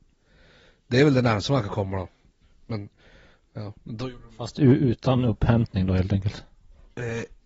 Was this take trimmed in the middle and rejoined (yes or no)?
no